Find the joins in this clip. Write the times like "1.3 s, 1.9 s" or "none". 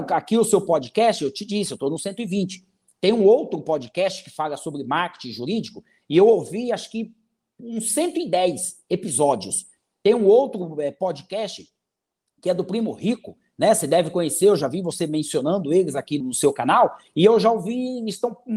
16.2 s